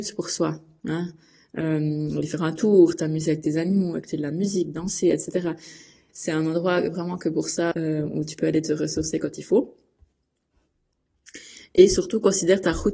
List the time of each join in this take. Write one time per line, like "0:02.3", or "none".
0:06.1
0:07.7